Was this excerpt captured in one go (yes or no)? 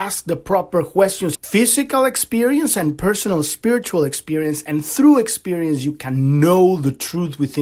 no